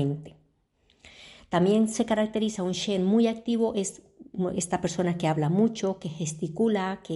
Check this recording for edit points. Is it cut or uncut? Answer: uncut